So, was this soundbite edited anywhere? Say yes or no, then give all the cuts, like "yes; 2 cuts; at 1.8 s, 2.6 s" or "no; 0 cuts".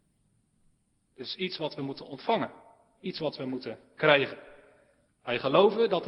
yes; 1 cut; at 5.1 s